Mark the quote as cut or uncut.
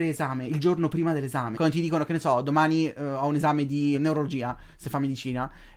cut